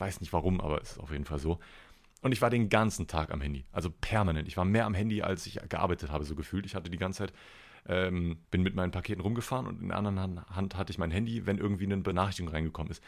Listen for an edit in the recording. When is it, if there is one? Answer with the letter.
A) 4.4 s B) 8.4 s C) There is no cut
B